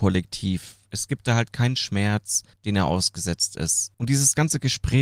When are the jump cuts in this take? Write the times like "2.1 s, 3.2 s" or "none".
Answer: 2.5 s, 3.9 s